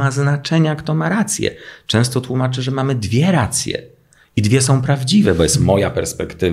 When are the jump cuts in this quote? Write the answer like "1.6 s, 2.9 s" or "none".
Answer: none